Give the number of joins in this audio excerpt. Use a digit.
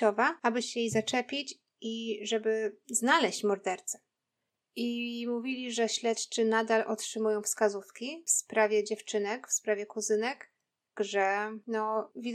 2